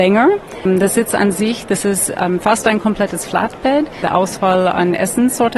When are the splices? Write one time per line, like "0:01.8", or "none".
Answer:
none